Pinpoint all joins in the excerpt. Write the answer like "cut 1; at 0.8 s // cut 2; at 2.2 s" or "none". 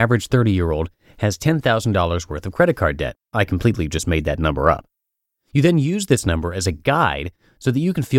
none